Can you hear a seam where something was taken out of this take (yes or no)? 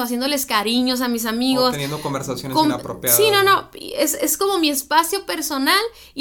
no